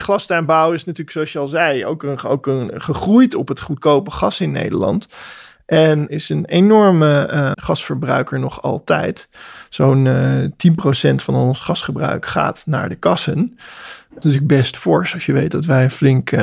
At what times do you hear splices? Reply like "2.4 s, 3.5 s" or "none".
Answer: 6.1 s, 7.5 s